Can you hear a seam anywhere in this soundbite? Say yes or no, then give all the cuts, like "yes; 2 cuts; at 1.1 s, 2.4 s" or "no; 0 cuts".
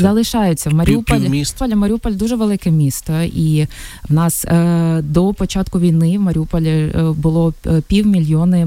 yes; 1 cut; at 1.6 s